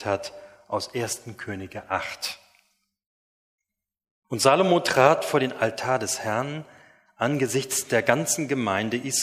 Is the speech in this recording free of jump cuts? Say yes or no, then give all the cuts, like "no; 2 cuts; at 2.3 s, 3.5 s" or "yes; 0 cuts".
yes; 0 cuts